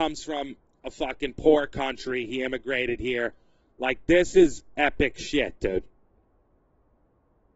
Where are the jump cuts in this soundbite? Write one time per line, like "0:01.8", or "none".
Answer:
0:03.6